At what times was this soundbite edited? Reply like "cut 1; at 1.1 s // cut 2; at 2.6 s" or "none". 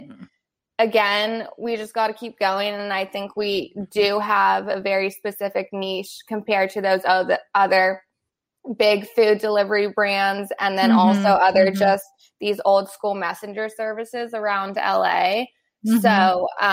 none